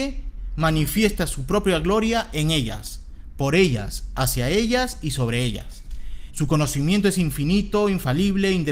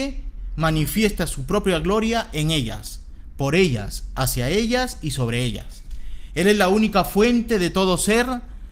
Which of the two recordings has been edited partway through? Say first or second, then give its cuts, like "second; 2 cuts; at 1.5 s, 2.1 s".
first; 1 cut; at 6.3 s